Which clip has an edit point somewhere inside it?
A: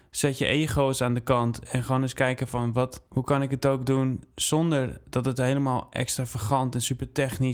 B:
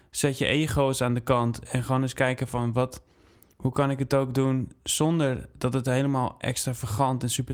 A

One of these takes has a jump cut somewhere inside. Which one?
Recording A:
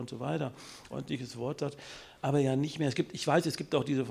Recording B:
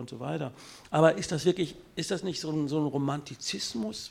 A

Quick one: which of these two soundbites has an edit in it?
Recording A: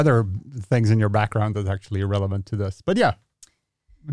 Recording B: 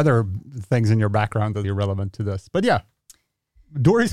B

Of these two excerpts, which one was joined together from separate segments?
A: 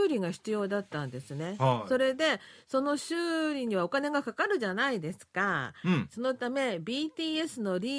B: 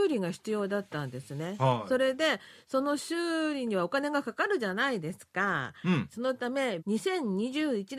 B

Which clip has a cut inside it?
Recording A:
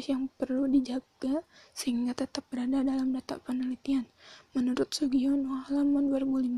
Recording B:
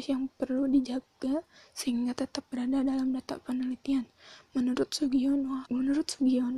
B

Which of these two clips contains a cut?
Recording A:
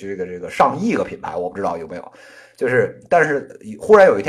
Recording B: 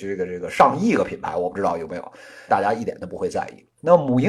B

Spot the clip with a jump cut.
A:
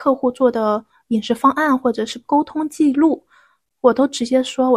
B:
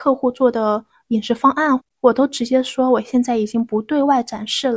B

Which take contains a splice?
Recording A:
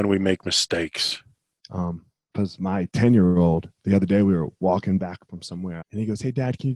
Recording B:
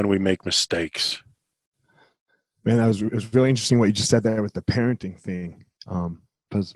A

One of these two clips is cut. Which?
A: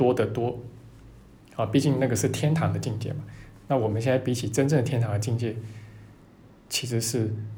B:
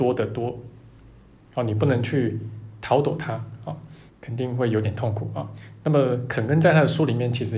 B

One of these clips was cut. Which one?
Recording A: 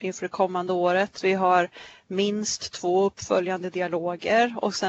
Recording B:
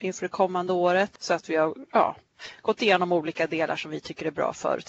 B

